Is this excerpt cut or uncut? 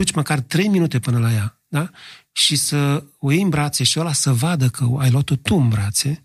uncut